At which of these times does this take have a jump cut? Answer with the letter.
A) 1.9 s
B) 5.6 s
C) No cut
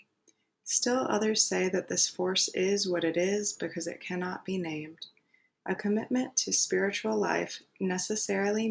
B